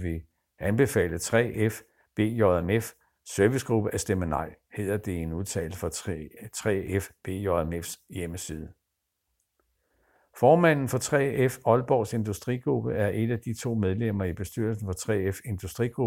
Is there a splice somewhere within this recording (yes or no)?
no